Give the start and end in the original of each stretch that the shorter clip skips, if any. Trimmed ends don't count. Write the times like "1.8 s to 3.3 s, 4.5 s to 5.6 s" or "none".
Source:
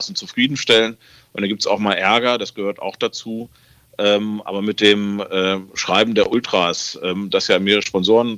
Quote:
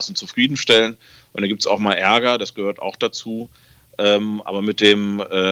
none

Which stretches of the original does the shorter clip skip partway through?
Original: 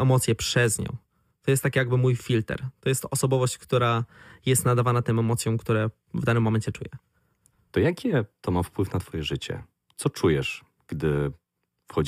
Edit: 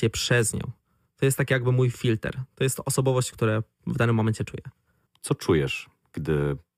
3.6 s to 5.6 s, 7.3 s to 9.8 s

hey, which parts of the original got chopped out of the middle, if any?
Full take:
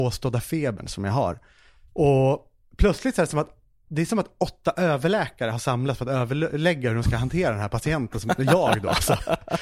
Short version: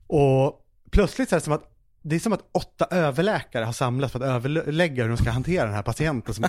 none

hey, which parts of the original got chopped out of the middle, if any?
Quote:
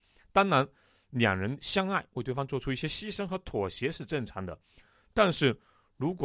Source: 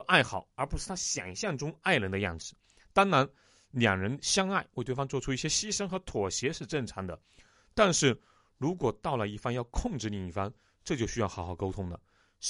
none

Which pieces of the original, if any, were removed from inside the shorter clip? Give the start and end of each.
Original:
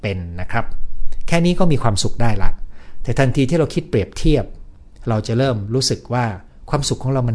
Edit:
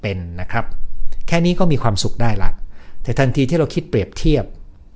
none

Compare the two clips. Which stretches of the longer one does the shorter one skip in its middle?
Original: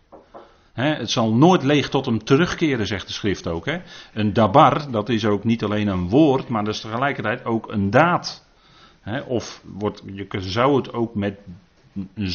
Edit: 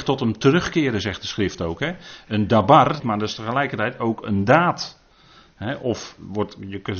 4.9 s to 6.5 s

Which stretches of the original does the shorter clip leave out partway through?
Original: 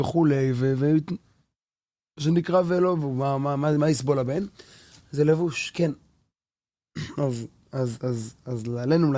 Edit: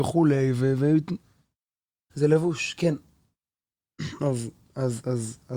2.1 s to 5.1 s

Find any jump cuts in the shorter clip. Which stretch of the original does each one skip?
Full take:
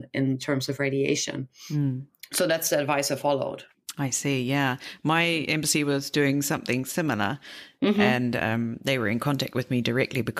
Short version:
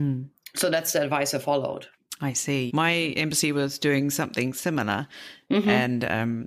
4.4 s to 5.0 s

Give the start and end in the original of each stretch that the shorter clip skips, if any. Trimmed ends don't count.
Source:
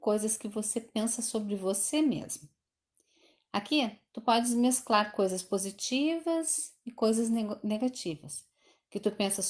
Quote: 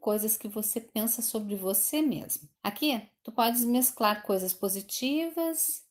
2.6 s to 3.5 s

